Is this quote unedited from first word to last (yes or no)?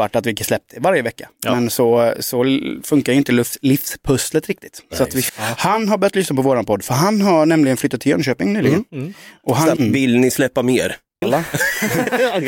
no